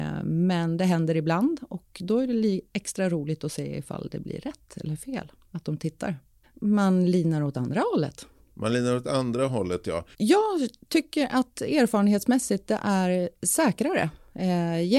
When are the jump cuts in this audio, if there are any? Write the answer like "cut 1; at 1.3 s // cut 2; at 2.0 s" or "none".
cut 1; at 6.4 s // cut 2; at 10.1 s

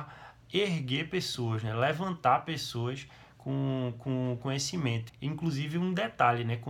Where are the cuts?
cut 1; at 5.1 s

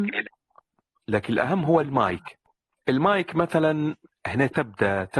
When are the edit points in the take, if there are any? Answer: none

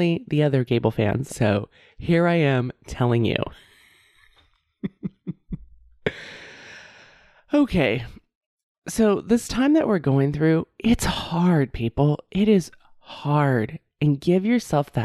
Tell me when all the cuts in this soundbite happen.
cut 1; at 1.3 s

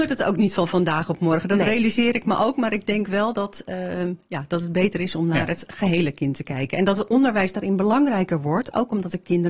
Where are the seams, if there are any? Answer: none

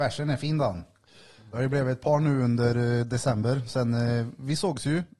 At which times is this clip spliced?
none

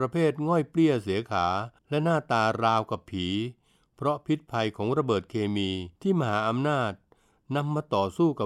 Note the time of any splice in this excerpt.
cut 1; at 1.8 s // cut 2; at 6.0 s

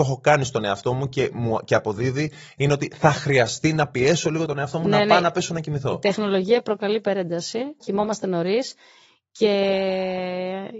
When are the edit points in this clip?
cut 1; at 7.8 s

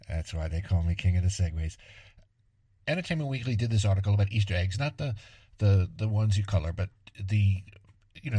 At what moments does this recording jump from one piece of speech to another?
none

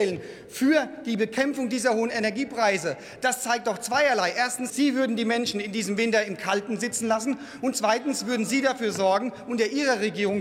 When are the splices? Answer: cut 1; at 4.7 s

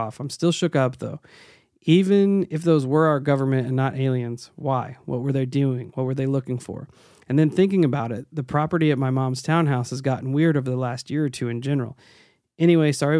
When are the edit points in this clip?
none

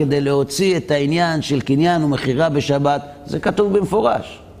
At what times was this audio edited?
none

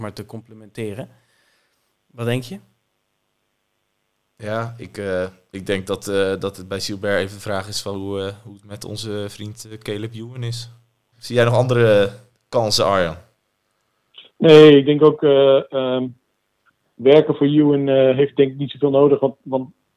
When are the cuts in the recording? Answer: cut 1; at 11.1 s // cut 2; at 14.3 s

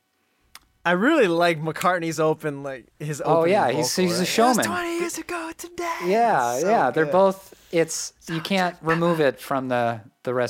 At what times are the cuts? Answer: none

